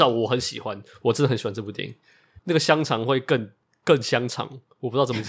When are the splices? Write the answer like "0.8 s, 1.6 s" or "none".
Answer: 2.4 s

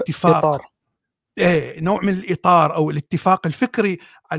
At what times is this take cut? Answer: none

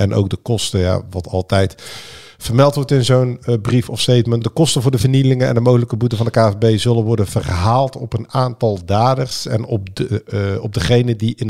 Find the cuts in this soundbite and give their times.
none

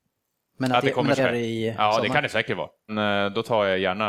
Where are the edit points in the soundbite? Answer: 1.2 s, 2.9 s

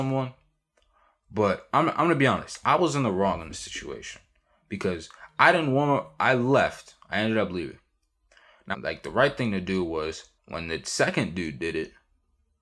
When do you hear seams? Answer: 8.7 s, 10.4 s

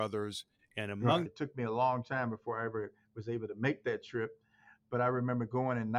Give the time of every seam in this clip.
1.3 s

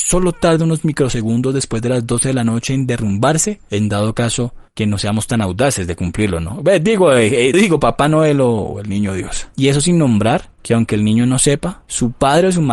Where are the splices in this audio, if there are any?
7.5 s

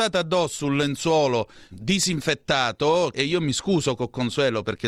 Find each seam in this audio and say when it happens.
1.7 s, 3.1 s

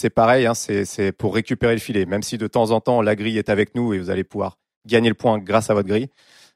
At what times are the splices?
none

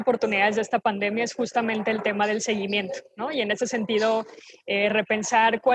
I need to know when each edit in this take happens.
none

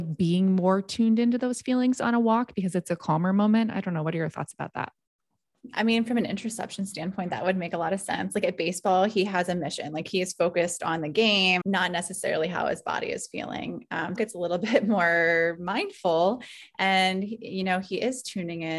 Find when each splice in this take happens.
11.6 s, 14.2 s

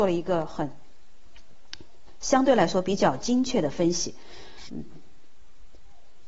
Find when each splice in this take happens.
4.7 s

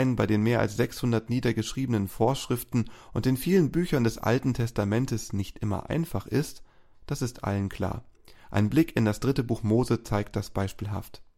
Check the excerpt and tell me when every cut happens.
none

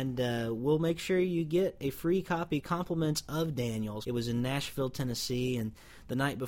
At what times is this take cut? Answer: 4.0 s

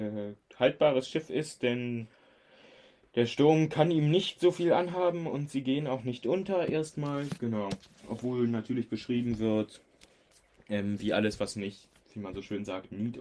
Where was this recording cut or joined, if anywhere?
none

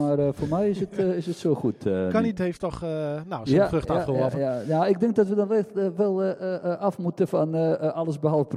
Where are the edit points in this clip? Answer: 2.3 s

